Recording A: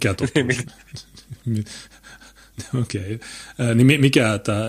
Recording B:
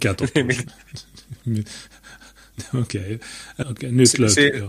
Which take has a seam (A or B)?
B